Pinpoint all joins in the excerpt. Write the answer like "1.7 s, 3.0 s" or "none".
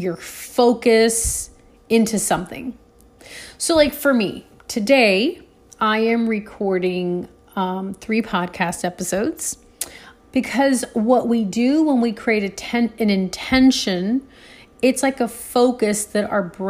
10.2 s